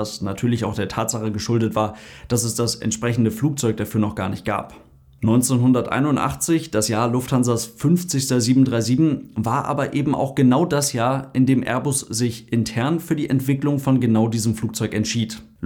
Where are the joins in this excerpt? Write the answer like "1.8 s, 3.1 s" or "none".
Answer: none